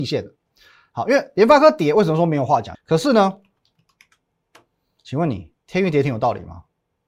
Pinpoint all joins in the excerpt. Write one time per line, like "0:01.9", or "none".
0:02.7
0:05.6